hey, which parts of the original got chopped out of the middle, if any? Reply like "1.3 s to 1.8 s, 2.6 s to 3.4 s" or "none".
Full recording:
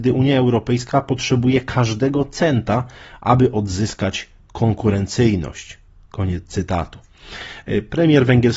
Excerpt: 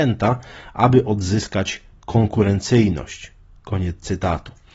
none